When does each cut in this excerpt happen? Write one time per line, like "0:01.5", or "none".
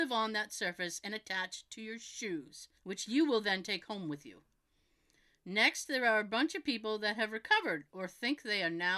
0:02.8